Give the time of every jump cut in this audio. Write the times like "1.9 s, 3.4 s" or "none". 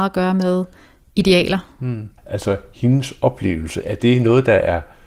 2.2 s